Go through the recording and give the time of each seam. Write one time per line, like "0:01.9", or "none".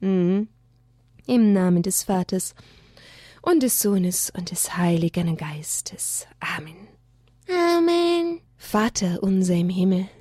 0:08.5